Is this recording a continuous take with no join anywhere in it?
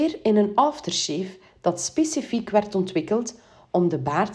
yes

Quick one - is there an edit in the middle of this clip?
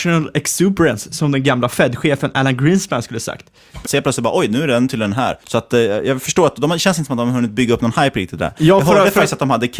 yes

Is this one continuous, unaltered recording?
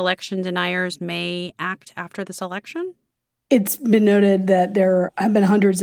yes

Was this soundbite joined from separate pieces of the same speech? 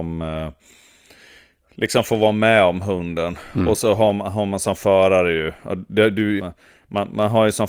yes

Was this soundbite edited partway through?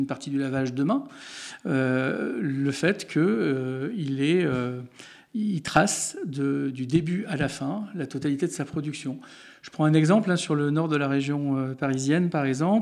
no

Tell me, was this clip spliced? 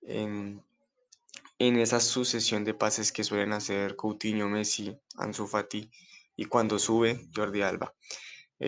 no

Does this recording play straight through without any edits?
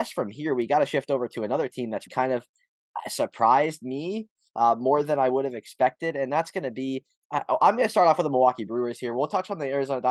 no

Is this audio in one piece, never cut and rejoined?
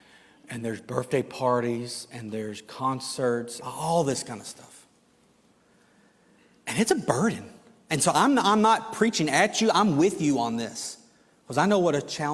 no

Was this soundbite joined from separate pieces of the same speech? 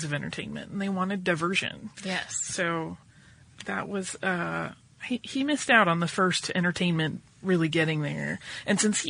yes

